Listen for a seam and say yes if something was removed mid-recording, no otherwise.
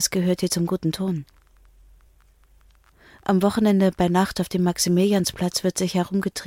no